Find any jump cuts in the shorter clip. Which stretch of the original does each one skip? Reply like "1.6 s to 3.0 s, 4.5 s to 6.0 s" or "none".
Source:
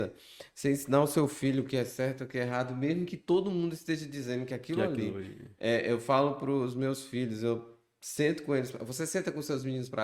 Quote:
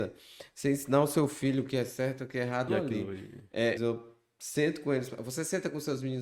2.7 s to 4.7 s, 5.8 s to 7.4 s